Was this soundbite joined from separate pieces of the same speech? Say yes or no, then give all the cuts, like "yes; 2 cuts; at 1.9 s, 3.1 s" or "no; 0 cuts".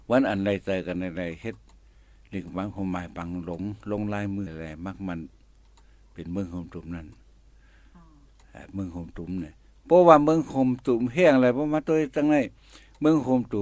yes; 1 cut; at 4.5 s